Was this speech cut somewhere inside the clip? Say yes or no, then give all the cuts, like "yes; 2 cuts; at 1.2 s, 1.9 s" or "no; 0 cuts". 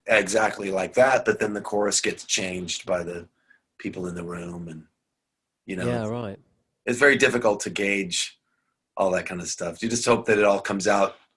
no; 0 cuts